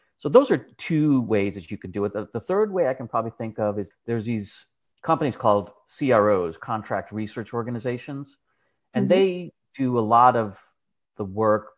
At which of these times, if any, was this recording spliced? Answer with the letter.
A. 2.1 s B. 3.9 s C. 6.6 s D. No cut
B